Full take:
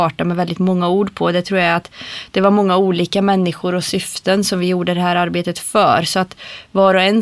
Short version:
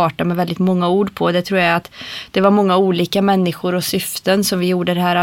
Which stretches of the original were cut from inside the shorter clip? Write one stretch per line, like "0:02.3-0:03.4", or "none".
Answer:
none